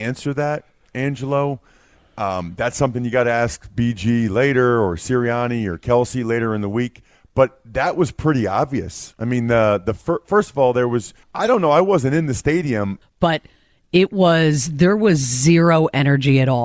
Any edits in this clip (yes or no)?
yes